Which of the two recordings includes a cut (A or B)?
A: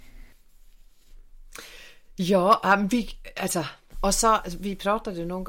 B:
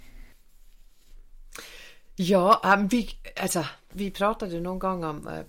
B